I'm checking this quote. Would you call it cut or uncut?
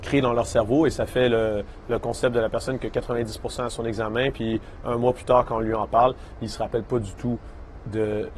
uncut